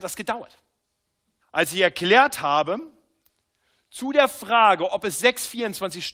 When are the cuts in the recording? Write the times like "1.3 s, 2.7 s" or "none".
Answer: 1.4 s